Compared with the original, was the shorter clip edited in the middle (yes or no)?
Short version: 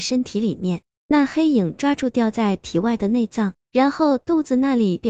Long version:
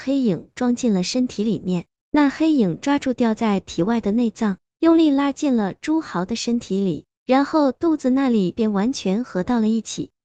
yes